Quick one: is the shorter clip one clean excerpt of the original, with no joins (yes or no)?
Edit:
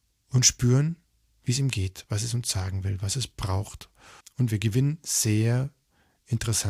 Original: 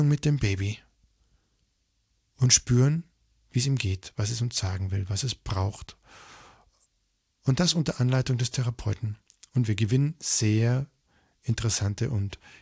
no